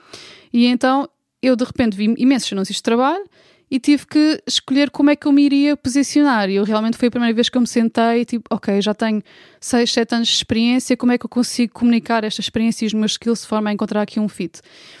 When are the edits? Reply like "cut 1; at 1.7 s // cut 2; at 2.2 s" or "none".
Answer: none

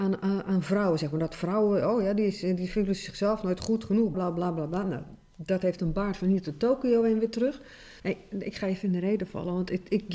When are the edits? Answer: cut 1; at 4.1 s // cut 2; at 8.0 s

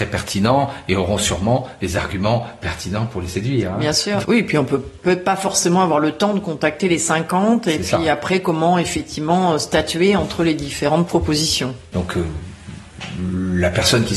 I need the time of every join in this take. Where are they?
cut 1; at 4.2 s // cut 2; at 11.9 s

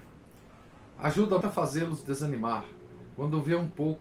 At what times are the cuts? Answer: cut 1; at 1.4 s

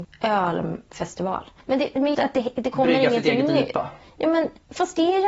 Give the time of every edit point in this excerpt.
cut 1; at 2.1 s

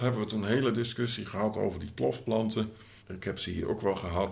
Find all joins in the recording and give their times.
cut 1; at 3.0 s

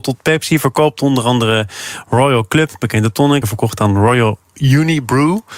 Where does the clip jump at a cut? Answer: cut 1; at 3.4 s

